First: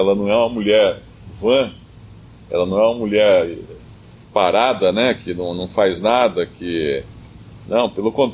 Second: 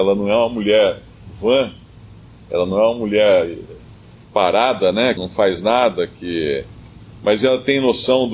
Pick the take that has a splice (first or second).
second